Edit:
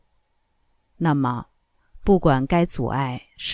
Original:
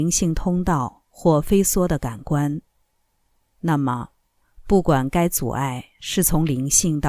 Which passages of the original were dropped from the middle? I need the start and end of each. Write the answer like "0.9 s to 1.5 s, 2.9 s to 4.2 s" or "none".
none